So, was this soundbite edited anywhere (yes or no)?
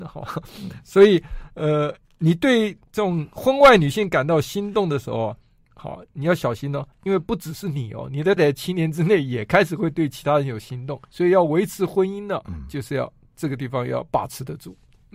yes